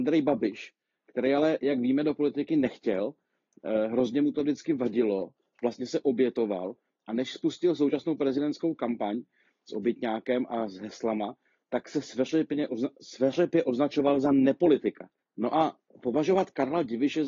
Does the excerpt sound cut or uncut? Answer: cut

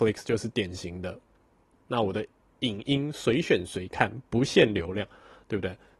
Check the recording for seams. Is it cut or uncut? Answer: cut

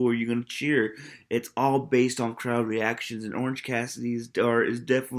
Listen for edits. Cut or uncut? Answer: uncut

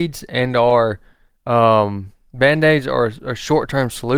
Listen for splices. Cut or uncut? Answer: uncut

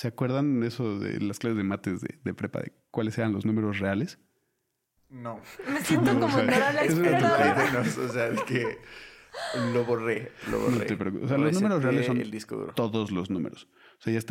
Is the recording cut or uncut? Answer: uncut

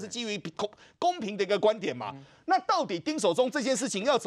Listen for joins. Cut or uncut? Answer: uncut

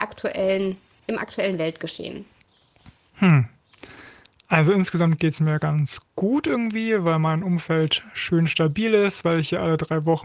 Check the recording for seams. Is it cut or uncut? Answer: uncut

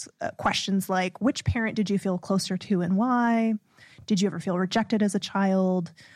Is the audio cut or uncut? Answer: uncut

